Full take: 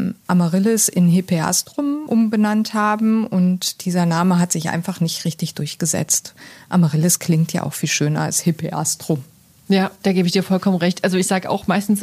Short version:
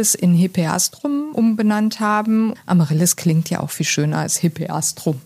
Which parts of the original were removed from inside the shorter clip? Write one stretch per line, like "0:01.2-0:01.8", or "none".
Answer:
0:03.3-0:06.6

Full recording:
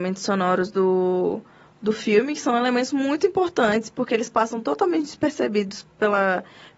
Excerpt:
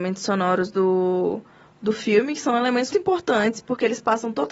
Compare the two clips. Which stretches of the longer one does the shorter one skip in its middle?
0:02.9-0:03.2

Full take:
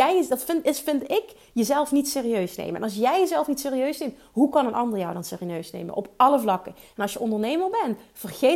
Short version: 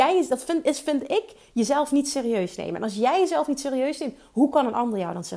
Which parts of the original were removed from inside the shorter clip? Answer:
none

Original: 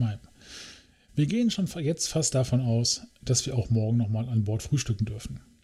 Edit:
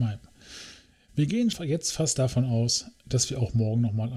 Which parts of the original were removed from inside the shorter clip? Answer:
0:01.5-0:01.7

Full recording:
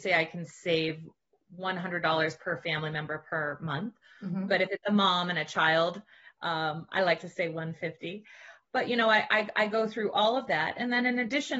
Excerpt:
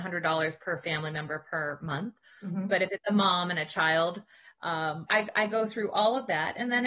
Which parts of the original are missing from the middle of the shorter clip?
0:06.9-0:09.3

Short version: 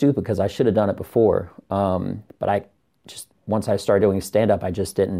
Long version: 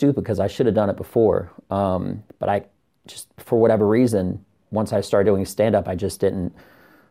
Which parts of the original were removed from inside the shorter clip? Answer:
0:03.3-0:04.6

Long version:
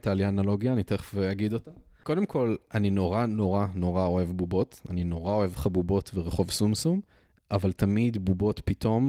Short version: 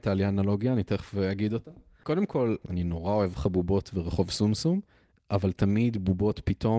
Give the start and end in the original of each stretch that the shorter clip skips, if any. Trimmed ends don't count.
0:02.6-0:04.8

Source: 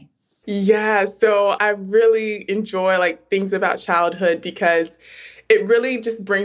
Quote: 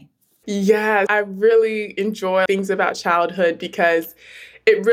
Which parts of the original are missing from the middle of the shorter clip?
0:01.1-0:01.6
0:03.0-0:03.3

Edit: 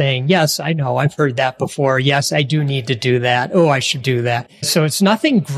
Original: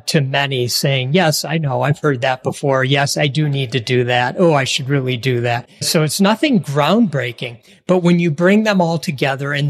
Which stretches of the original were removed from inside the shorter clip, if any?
0:04.8-0:05.2

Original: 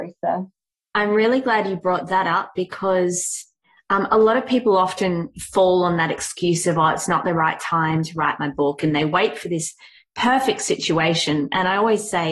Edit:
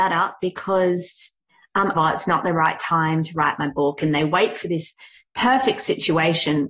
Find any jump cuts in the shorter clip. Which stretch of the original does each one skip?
0:04.1-0:06.8

